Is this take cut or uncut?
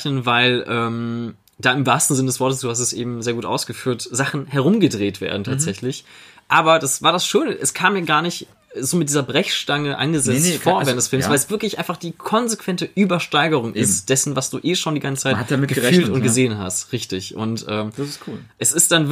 uncut